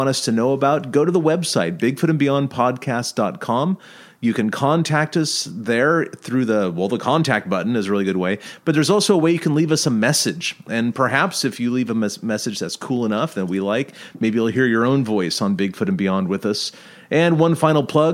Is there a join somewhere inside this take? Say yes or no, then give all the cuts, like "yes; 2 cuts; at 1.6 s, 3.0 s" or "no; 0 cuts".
no; 0 cuts